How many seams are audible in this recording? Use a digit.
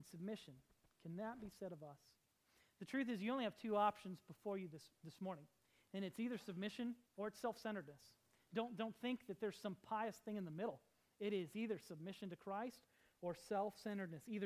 1